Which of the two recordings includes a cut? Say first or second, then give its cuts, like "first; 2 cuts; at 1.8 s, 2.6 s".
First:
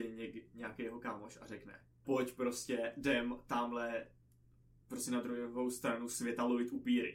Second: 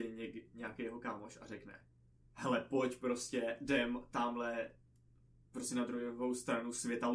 first; 1 cut; at 2.0 s